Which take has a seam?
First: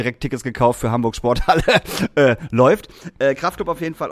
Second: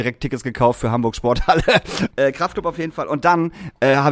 second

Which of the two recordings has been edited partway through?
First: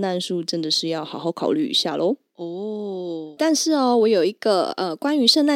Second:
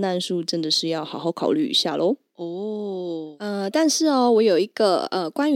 first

